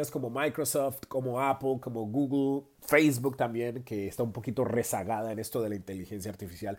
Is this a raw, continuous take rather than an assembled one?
yes; 0 cuts

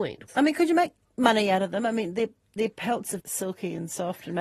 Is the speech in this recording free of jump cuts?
no; 1 cut; at 3.2 s

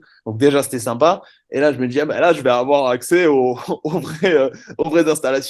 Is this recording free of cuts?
yes; 0 cuts

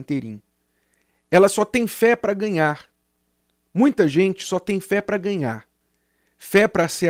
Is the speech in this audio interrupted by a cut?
no; 0 cuts

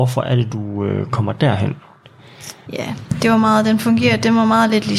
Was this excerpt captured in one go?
no; 1 cut; at 2.7 s

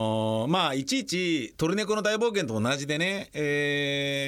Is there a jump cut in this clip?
no; 0 cuts

